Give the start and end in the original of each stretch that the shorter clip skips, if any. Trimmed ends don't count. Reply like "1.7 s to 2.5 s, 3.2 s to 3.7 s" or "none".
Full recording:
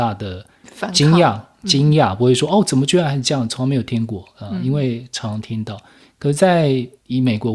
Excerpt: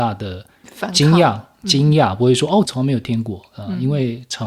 2.6 s to 3.5 s